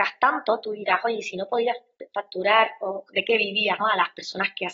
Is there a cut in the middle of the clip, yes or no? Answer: yes